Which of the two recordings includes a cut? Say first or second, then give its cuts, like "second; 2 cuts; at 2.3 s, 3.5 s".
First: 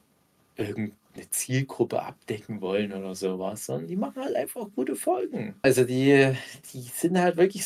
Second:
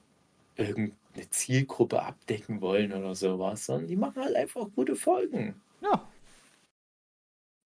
first; 1 cut; at 5.6 s